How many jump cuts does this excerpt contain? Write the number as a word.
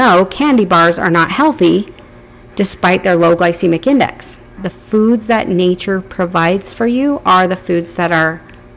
one